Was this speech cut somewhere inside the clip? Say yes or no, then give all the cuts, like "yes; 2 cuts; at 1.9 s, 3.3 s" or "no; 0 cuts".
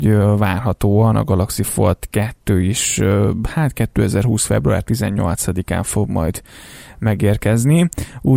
no; 0 cuts